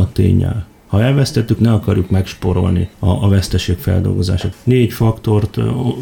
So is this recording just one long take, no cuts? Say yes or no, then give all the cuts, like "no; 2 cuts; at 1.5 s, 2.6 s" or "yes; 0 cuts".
no; 2 cuts; at 1.6 s, 4.5 s